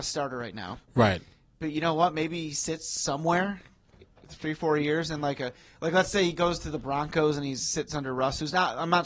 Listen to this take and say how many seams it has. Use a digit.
0